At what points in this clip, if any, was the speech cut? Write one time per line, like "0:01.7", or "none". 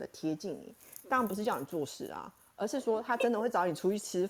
0:01.0